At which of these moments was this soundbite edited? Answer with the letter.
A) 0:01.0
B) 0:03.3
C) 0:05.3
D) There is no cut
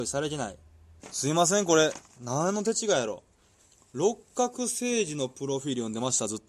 A